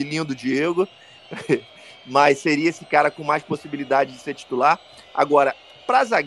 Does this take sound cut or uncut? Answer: uncut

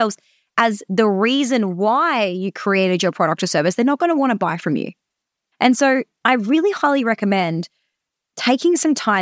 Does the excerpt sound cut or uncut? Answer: cut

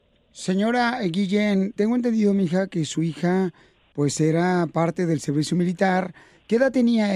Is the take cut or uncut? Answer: cut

